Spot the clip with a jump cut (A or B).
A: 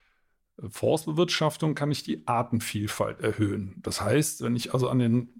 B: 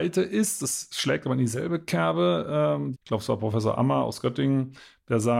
B